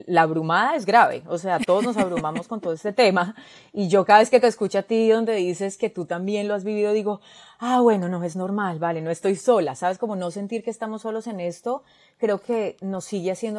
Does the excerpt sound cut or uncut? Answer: uncut